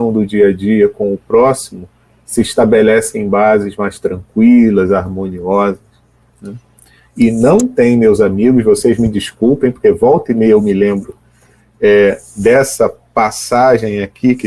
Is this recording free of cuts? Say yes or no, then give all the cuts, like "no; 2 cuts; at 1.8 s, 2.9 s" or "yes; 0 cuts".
yes; 0 cuts